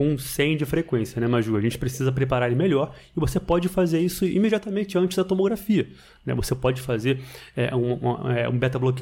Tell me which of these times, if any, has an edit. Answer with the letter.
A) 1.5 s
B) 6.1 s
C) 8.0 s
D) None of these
D